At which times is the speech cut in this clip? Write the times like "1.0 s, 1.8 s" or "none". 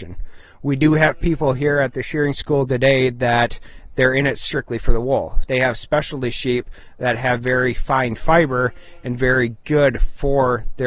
5.4 s